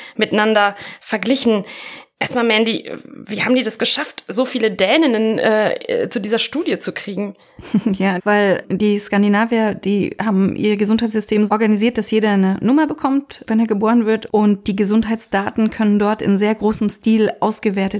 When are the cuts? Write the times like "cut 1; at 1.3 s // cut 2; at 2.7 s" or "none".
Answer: cut 1; at 8.2 s // cut 2; at 11.5 s // cut 3; at 14.3 s